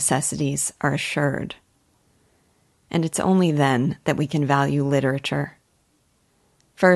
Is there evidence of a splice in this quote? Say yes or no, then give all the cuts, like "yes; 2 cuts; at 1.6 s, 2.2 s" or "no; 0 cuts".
no; 0 cuts